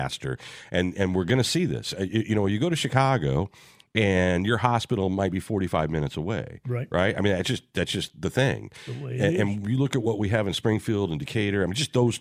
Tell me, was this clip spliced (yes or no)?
no